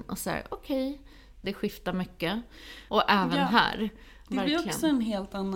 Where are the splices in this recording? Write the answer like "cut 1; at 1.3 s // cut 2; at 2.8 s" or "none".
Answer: cut 1; at 1.4 s // cut 2; at 2.9 s // cut 3; at 4.3 s